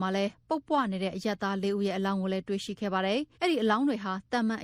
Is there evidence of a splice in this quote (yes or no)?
yes